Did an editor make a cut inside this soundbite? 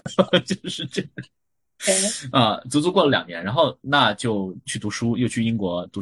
no; 0 cuts

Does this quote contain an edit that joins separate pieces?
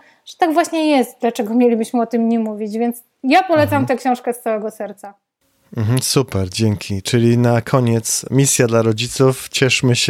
no; 0 cuts

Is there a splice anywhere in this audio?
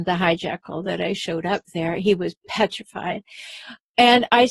no; 0 cuts

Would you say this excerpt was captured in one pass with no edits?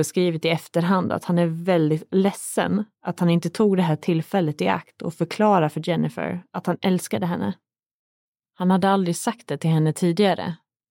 yes; 0 cuts

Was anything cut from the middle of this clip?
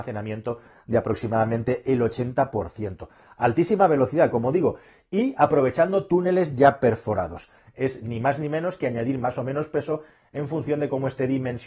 yes; 1 cut; at 7.6 s

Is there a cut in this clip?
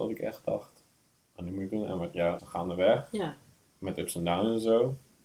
yes; 1 cut; at 2.4 s

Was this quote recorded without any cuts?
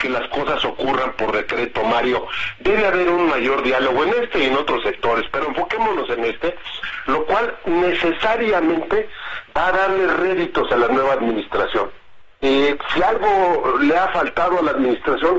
yes; 0 cuts

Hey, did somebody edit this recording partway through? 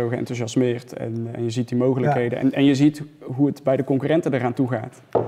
no; 0 cuts

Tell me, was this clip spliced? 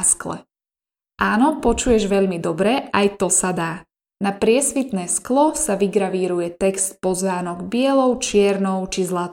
no; 0 cuts

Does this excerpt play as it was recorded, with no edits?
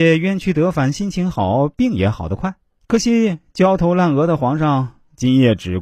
no; 1 cut; at 2.8 s

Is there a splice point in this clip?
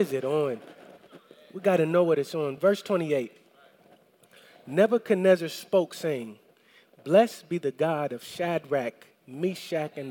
no; 0 cuts

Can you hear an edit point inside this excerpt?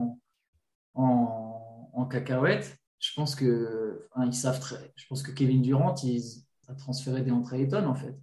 yes; 2 cuts; at 2.9 s, 6.6 s

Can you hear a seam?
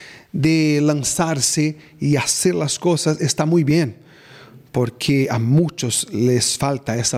no; 0 cuts

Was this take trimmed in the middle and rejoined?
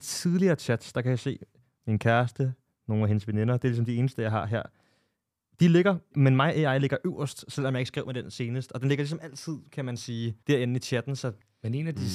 yes; 2 cuts; at 6.1 s, 10.4 s

